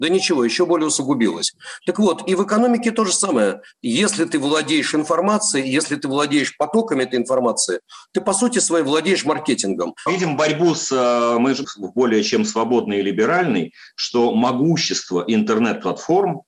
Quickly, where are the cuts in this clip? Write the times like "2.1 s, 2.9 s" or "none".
10.1 s, 11.6 s